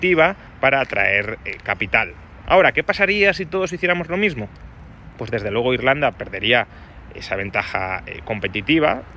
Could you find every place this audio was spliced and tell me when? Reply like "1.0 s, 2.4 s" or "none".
2.4 s